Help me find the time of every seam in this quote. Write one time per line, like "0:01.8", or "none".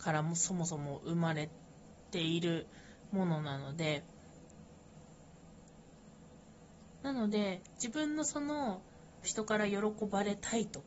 0:09.2

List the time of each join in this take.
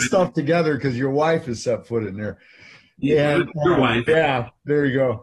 0:04.1

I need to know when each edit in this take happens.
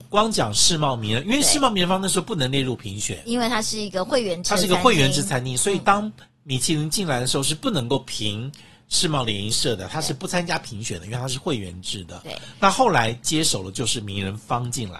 none

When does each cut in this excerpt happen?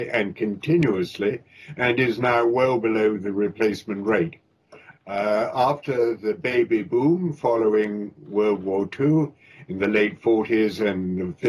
0:04.9

